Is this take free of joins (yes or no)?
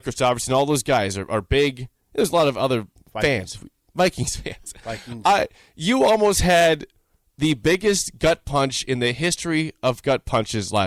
yes